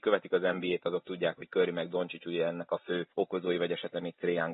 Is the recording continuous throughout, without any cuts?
no; 1 cut; at 3.1 s

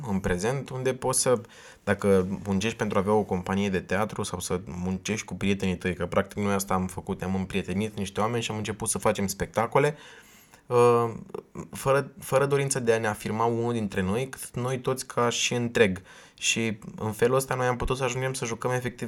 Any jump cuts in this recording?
no; 0 cuts

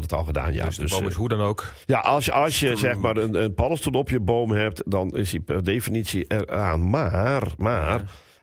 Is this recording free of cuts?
yes; 0 cuts

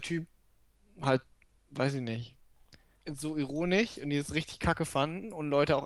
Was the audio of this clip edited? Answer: yes; 1 cut; at 3.0 s

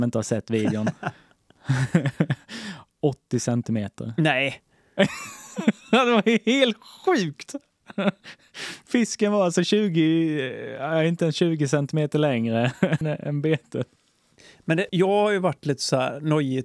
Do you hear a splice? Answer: yes; 2 cuts; at 13.0 s, 14.9 s

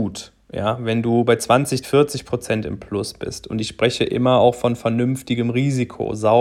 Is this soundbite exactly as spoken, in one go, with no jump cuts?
no; 1 cut; at 1.8 s

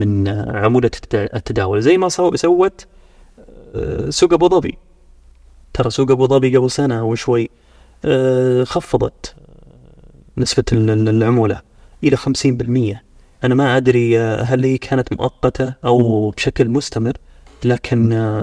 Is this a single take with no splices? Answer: yes; 0 cuts

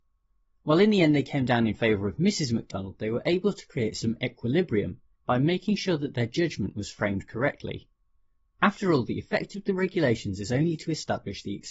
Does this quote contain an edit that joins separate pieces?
no; 0 cuts

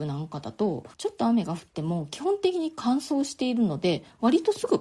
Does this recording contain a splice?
yes; 1 cut; at 0.9 s

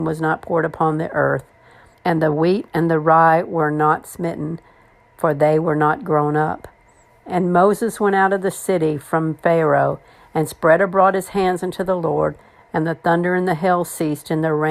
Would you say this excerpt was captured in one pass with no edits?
no; 1 cut; at 1.9 s

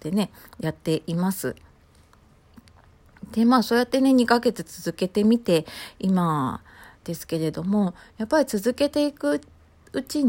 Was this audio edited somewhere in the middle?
no; 0 cuts

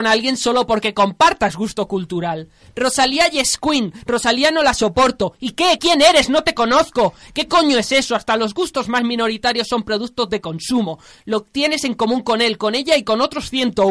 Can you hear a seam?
yes; 1 cut; at 5.8 s

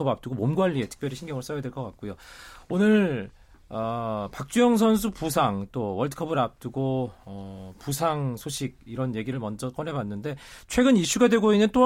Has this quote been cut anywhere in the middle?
no; 0 cuts

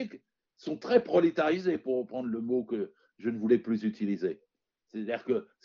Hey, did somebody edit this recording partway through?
yes; 1 cut; at 4.7 s

